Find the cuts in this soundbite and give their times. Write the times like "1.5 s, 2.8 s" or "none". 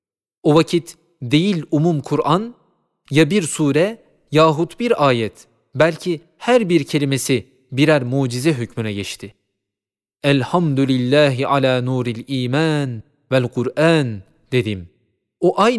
none